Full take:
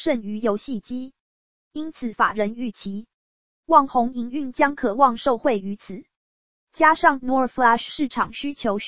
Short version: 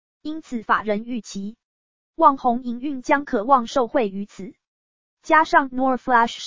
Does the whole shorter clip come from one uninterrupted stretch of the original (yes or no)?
yes